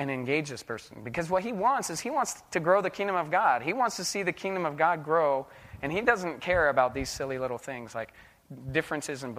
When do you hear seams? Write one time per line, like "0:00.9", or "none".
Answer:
none